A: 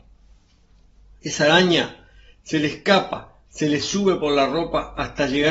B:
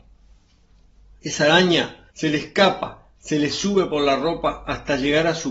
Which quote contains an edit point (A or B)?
B